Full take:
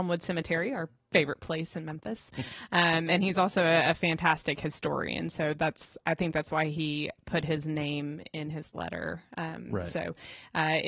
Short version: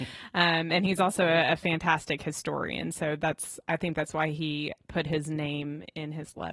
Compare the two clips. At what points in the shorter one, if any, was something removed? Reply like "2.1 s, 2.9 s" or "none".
none